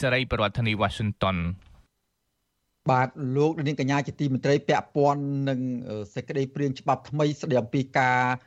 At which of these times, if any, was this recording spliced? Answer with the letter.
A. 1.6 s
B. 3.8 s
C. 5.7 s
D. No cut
D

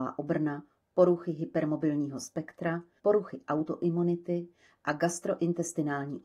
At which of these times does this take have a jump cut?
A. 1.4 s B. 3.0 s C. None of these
B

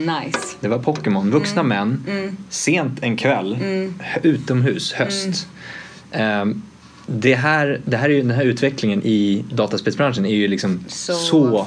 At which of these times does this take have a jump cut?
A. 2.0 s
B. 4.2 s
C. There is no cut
C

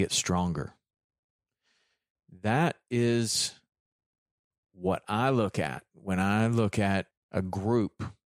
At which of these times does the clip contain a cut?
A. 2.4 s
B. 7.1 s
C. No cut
B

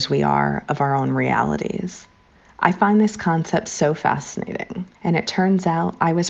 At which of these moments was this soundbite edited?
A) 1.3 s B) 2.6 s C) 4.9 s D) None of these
C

